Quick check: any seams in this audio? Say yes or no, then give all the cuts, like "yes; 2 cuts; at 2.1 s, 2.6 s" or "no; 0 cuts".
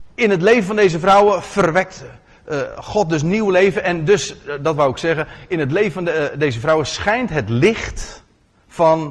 no; 0 cuts